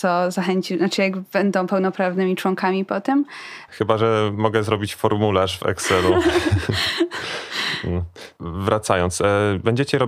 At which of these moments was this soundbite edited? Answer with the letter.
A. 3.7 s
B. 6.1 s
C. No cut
A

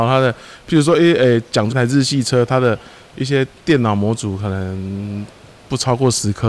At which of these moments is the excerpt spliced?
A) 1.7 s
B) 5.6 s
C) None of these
A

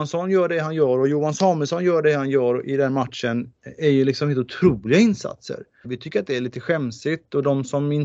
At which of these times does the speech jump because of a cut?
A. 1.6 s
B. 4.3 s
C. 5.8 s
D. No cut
C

